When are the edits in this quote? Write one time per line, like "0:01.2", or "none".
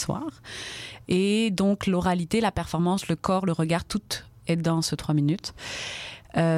none